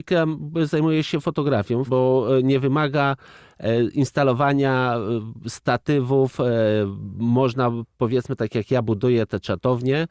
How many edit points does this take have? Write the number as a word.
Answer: one